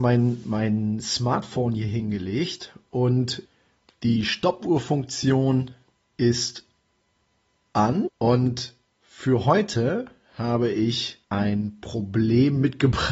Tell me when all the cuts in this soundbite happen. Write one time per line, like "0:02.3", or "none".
0:08.1
0:11.2